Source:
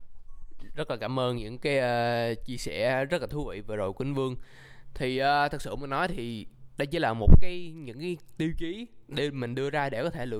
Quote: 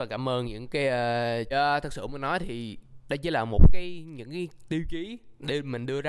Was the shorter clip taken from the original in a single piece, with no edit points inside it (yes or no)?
no